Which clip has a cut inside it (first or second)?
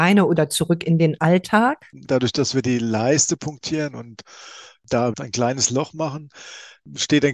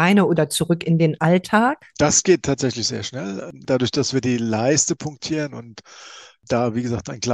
first